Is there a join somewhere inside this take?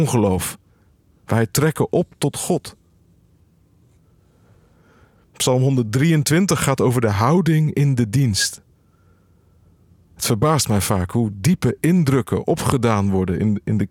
no; 0 cuts

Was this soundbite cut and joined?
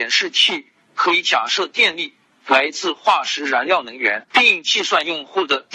yes; 1 cut; at 4.3 s

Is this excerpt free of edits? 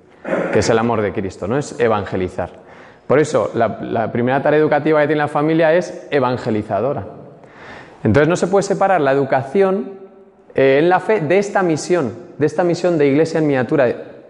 yes; 0 cuts

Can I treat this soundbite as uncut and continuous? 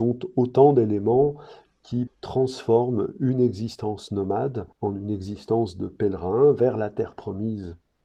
no; 2 cuts; at 2.1 s, 4.7 s

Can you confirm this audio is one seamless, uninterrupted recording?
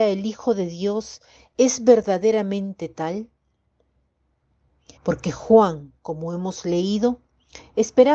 no; 1 cut; at 5.0 s

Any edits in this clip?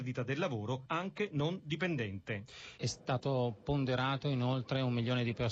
yes; 1 cut; at 2.8 s

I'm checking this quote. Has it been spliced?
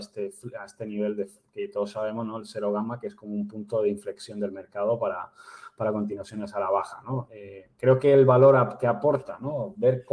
no; 0 cuts

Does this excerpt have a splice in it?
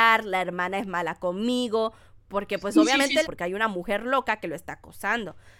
yes; 1 cut; at 3.2 s

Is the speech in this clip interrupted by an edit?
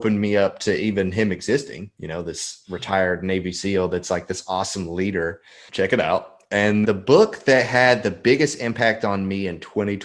yes; 2 cuts; at 5.7 s, 6.8 s

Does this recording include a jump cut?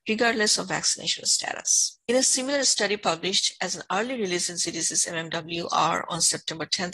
yes; 1 cut; at 2.0 s

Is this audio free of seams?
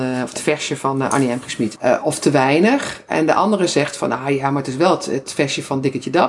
no; 1 cut; at 1.7 s

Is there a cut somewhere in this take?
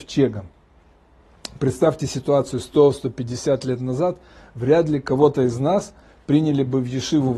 no; 0 cuts

